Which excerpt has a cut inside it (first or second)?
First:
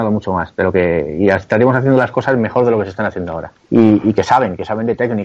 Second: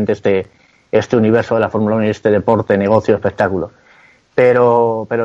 first